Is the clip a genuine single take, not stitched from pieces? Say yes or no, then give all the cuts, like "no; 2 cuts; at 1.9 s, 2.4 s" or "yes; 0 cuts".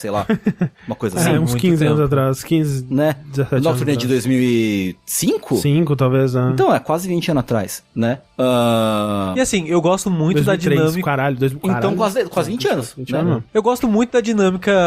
yes; 0 cuts